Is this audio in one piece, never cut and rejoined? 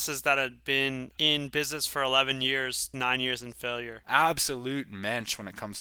no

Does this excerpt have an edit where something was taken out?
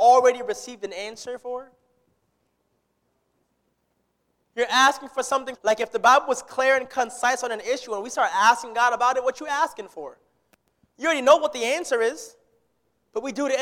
yes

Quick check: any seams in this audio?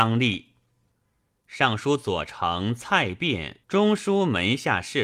yes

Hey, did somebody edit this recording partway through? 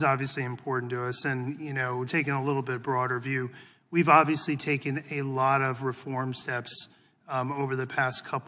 yes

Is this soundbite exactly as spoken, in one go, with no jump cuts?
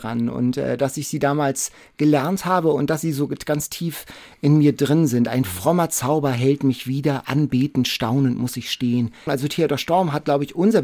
no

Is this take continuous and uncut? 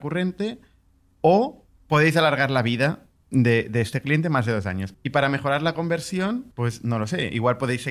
no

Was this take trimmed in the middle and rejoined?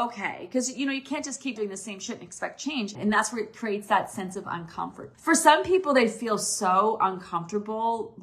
yes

